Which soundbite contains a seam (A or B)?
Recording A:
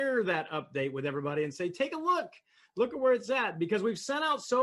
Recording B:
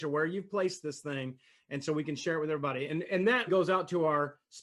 B